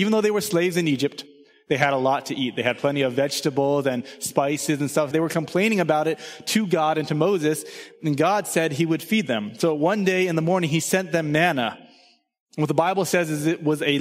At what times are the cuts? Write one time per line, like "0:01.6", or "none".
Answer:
0:05.1